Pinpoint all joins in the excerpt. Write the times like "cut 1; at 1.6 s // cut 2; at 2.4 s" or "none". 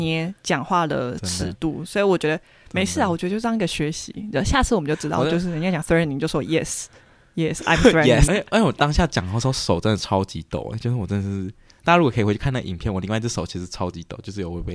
cut 1; at 8.3 s